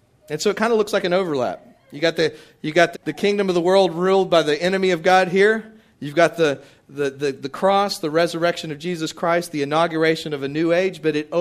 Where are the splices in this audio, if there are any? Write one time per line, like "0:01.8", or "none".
0:02.9